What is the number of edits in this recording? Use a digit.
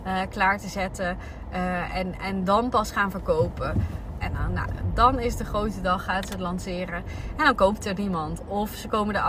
1